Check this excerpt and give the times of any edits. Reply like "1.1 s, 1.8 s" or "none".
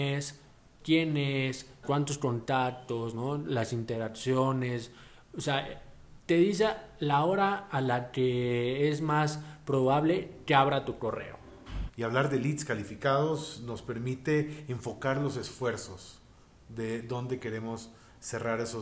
1.8 s, 11.9 s